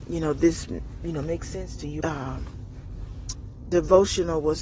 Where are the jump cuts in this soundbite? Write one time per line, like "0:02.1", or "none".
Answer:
0:02.0